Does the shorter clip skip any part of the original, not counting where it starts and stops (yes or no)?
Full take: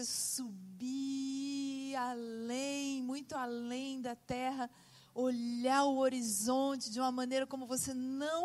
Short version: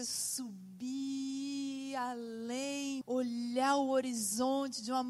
yes